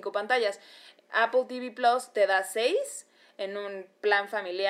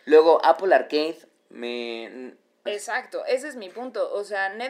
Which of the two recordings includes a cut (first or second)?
second